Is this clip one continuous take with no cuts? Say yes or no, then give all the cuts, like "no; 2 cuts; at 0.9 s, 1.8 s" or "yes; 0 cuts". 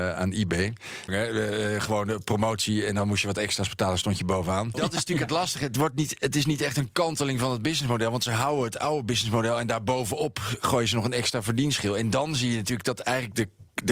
no; 2 cuts; at 1.1 s, 4.7 s